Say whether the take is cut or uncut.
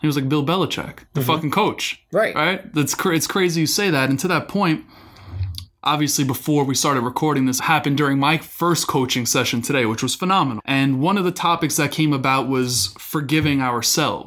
cut